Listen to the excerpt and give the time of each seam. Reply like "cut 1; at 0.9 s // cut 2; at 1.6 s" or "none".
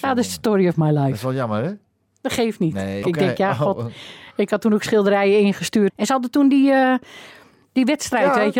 cut 1; at 3.0 s // cut 2; at 5.9 s